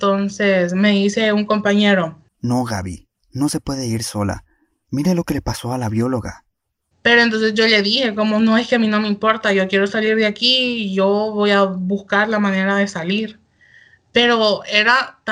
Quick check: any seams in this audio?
yes; 1 cut; at 6.9 s

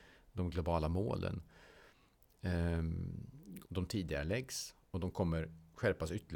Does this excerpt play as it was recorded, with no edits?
no; 1 cut; at 3.6 s

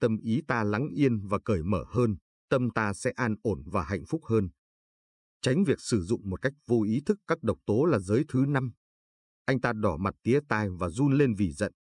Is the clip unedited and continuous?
no; 1 cut; at 9.3 s

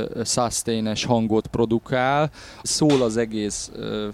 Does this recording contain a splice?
yes; 1 cut; at 2.6 s

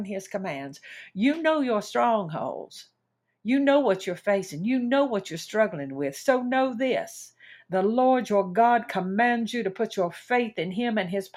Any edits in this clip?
no; 0 cuts

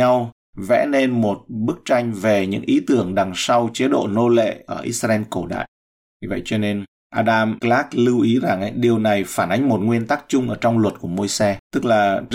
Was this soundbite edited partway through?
yes; 1 cut; at 6.1 s

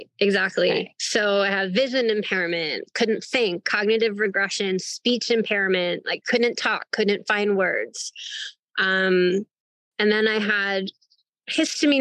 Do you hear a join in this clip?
no; 0 cuts

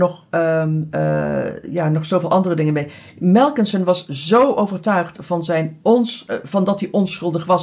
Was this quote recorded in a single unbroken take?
yes; 0 cuts

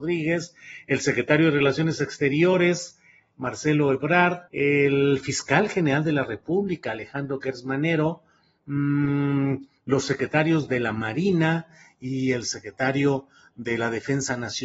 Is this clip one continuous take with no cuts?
no; 1 cut; at 4.5 s

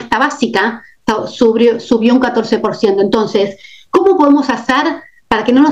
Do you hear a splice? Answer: no; 0 cuts

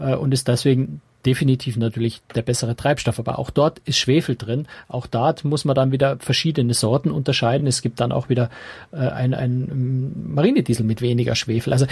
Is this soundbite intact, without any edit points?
yes; 0 cuts

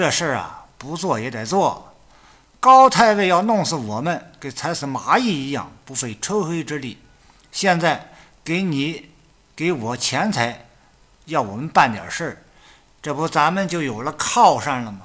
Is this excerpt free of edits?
yes; 0 cuts

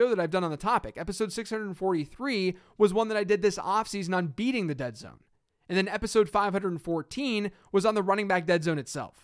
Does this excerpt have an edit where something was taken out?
no; 0 cuts

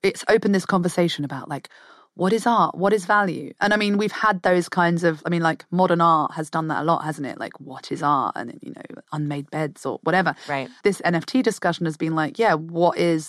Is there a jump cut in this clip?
no; 0 cuts

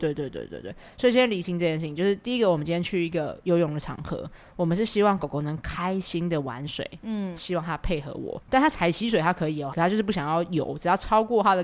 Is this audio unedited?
no; 3 cuts; at 7.4 s, 8.4 s, 9.7 s

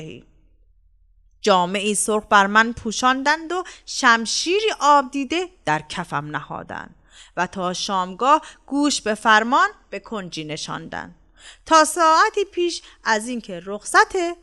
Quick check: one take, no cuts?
yes; 0 cuts

